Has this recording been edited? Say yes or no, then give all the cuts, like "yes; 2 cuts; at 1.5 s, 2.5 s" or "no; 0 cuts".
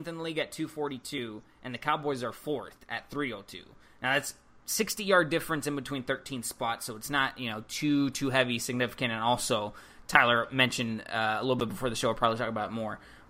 no; 0 cuts